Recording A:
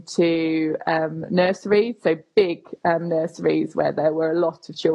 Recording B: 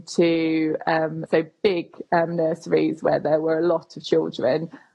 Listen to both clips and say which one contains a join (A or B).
B